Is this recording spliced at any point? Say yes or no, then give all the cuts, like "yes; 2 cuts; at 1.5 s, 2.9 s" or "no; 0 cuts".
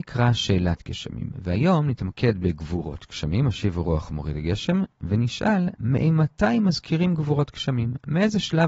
no; 0 cuts